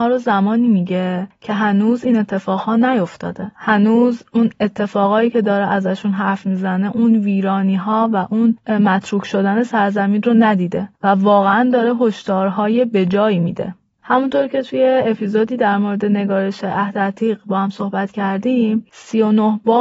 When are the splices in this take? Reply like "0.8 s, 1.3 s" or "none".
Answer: 3.5 s, 14.0 s